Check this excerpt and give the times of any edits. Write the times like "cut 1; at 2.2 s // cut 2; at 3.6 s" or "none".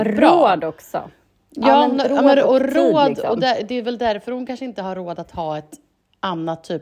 none